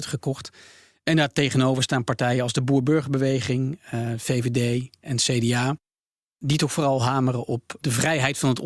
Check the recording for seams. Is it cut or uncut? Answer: uncut